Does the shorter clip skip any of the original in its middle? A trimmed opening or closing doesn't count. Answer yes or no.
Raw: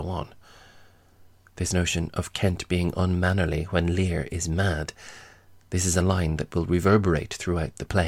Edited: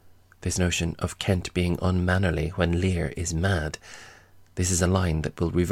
no